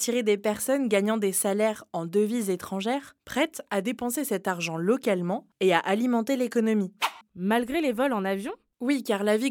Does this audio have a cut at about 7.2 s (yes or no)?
yes